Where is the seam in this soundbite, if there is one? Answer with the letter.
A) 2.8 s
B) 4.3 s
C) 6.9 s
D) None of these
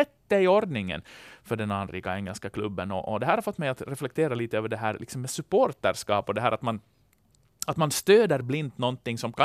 D